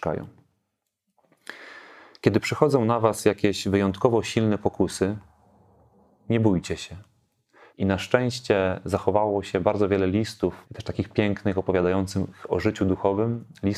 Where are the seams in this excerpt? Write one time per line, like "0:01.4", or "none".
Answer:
0:07.7
0:10.6